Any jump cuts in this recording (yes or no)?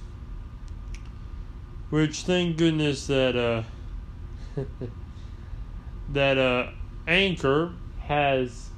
no